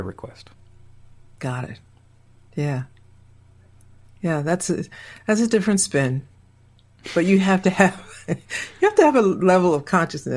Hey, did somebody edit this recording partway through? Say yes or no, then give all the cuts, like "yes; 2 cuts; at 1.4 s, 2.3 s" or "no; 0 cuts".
no; 0 cuts